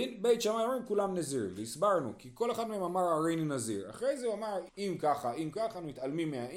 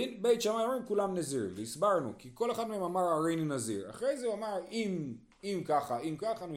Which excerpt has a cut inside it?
first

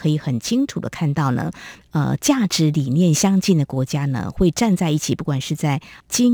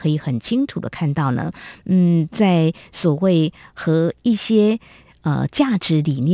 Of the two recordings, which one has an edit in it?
first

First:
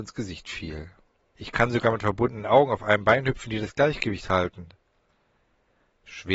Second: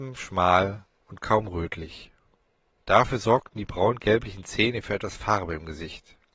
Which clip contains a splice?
first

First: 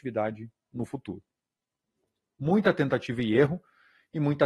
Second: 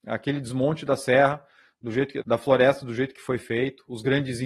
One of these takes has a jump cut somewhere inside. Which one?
second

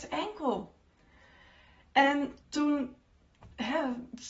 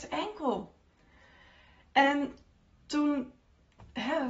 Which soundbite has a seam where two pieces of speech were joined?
first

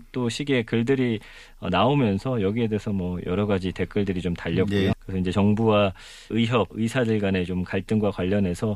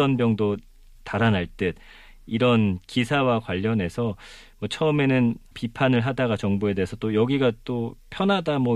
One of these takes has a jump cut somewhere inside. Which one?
first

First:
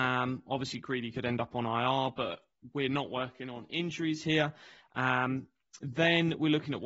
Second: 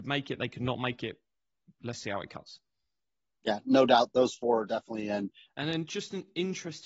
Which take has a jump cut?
second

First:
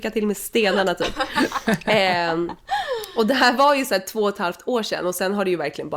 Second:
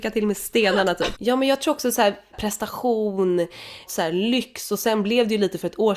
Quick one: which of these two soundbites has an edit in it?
second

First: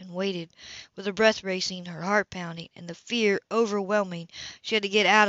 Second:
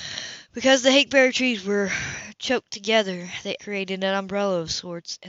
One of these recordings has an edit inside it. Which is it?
second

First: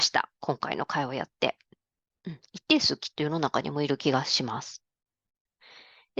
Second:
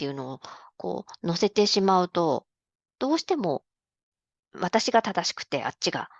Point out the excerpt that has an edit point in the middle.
first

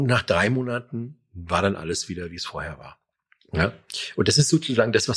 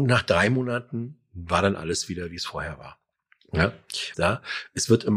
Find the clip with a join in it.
second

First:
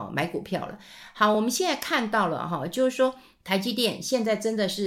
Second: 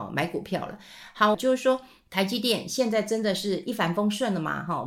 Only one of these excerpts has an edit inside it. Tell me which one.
second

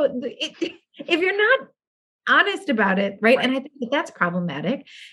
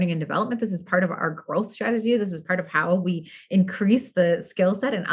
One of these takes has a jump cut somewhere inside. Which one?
first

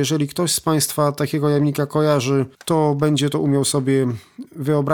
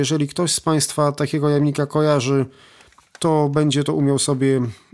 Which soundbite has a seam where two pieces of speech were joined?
first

